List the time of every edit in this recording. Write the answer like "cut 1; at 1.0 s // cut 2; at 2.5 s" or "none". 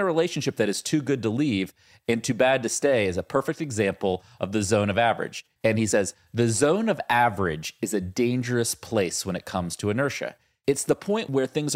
cut 1; at 5.6 s